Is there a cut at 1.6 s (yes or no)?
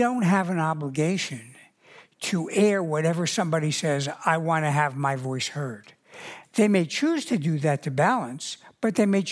no